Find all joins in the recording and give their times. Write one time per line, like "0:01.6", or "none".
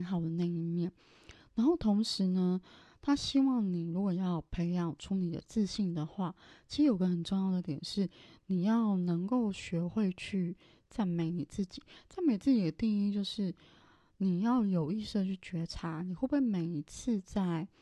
none